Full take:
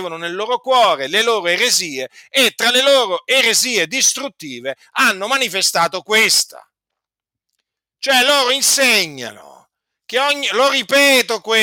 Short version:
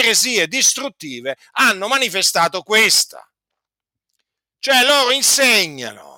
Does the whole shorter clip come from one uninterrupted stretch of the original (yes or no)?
yes